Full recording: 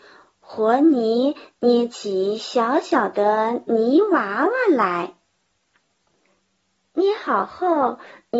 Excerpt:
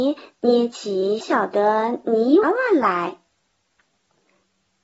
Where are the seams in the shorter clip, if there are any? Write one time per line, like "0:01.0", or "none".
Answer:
0:01.2
0:02.4

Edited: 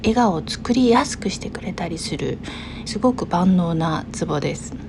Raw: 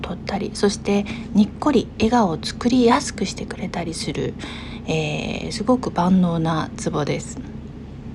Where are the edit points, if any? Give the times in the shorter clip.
0:02.9

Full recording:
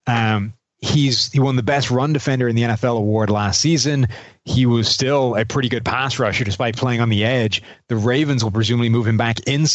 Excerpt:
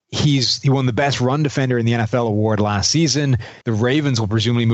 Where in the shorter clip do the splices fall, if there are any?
0:03.6

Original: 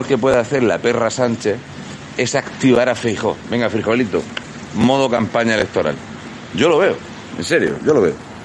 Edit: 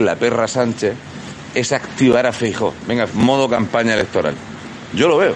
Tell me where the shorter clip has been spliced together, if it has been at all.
0:03.1

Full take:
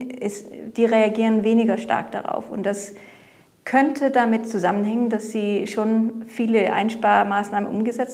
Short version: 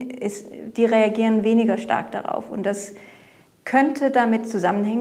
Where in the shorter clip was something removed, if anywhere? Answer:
none

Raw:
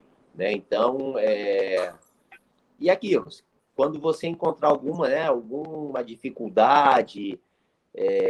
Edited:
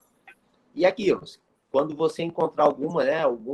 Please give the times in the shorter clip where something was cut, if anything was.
none

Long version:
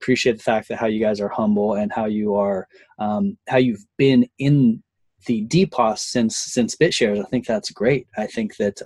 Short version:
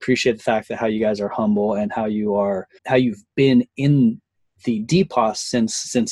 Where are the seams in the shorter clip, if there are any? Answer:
0:02.8

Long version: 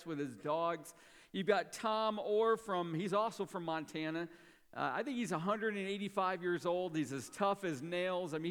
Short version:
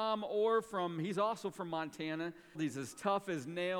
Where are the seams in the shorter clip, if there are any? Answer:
0:02.5

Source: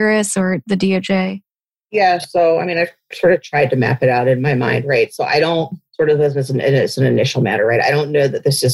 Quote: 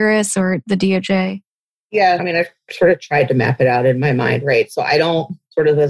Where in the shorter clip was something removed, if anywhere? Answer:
0:02.2

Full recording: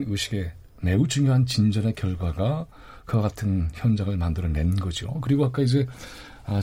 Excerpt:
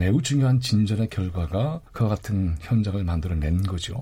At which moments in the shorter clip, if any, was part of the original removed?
0:01.9

